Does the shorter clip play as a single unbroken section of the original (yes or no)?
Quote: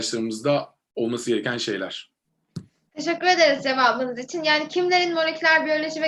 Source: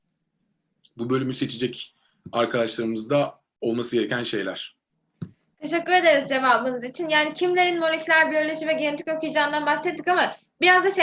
yes